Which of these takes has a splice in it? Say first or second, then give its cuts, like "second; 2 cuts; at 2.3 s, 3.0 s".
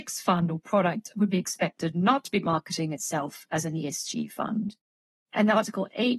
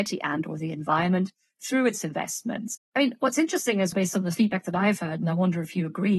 second; 2 cuts; at 2.8 s, 3.9 s